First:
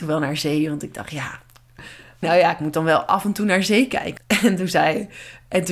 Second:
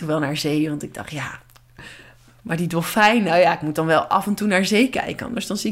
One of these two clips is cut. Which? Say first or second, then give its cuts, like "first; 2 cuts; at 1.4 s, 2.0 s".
first; 2 cuts; at 2.2 s, 4.2 s